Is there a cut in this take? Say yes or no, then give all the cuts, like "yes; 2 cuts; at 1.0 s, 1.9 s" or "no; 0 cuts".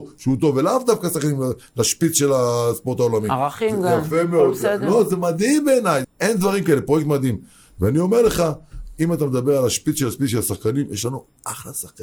yes; 1 cut; at 6.0 s